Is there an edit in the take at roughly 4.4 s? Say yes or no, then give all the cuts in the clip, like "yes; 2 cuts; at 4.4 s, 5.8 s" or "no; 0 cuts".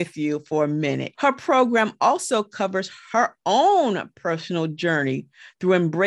no; 1 cut; at 1.1 s